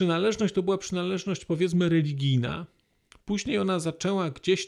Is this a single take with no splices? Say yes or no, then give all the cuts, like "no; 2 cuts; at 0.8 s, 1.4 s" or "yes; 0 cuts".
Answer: yes; 0 cuts